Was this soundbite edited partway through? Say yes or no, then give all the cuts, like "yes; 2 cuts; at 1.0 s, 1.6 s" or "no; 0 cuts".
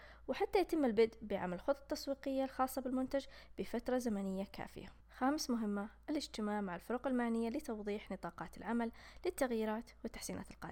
yes; 1 cut; at 5.0 s